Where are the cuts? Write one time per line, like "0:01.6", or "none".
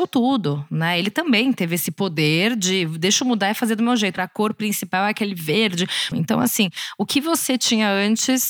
0:04.2
0:06.1

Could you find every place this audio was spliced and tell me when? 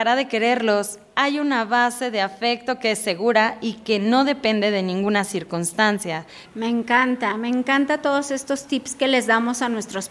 0:06.4

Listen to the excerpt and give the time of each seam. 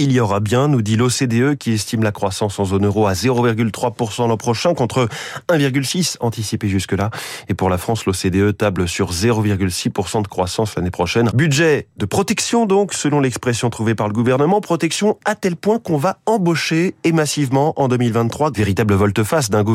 0:11.3
0:18.5

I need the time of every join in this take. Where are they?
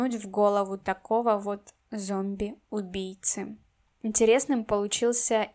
none

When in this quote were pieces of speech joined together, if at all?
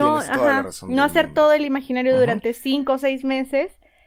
none

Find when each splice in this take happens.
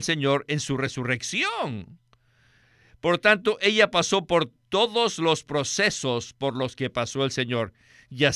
none

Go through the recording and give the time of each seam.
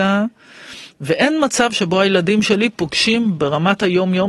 0:00.9

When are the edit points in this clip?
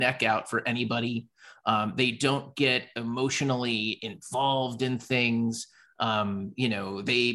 none

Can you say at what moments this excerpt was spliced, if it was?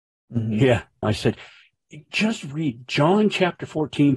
0:01.0

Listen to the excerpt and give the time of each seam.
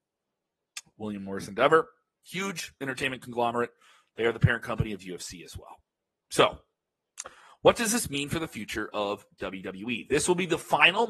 none

